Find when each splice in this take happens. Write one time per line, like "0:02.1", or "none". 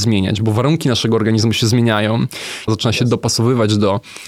0:02.7